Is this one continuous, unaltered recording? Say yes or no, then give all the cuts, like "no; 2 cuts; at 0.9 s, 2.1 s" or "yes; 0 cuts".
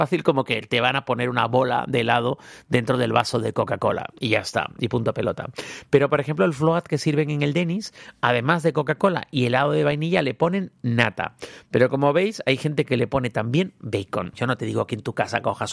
no; 1 cut; at 14.3 s